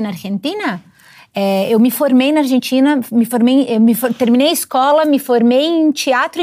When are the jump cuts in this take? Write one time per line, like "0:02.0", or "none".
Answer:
none